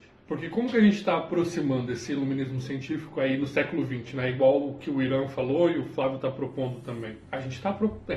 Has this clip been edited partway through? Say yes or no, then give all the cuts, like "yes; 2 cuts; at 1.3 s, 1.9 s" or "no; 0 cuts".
no; 0 cuts